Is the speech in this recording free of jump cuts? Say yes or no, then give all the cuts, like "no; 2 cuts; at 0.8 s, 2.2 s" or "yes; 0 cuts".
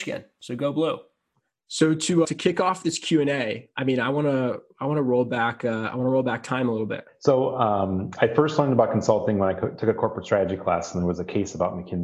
no; 2 cuts; at 2.2 s, 7.1 s